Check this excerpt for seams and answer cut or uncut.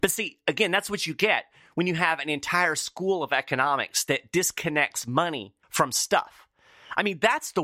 cut